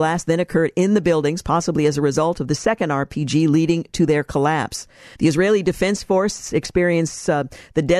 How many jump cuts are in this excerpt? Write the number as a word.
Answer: one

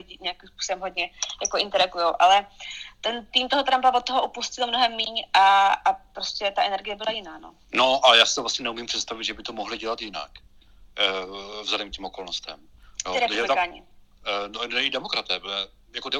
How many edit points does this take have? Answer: zero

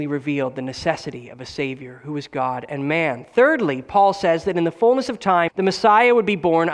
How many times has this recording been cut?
one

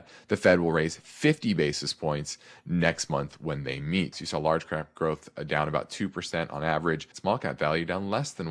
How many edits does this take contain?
two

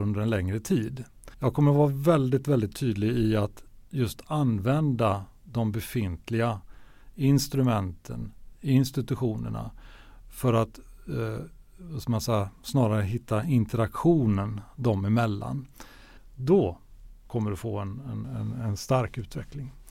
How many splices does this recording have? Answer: three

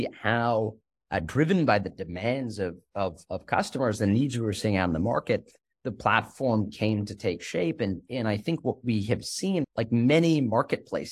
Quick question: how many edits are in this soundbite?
one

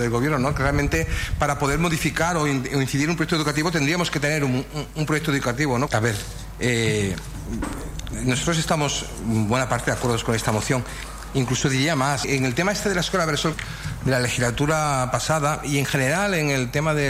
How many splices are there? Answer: three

